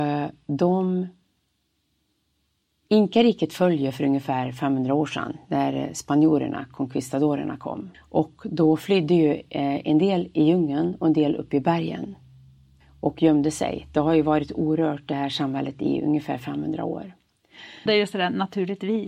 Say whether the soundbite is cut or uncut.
cut